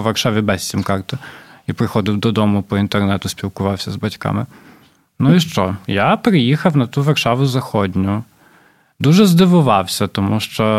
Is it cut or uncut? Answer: uncut